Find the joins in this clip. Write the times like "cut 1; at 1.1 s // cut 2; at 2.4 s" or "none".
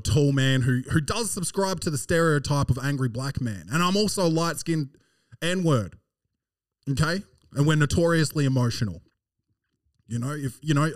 none